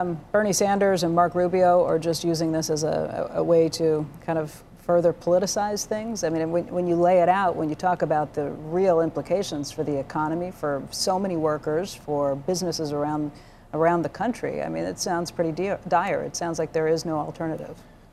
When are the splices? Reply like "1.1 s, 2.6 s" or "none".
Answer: none